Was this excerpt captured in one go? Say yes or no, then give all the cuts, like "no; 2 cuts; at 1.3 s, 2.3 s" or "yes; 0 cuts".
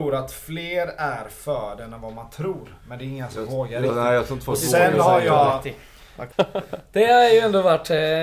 no; 1 cut; at 6.3 s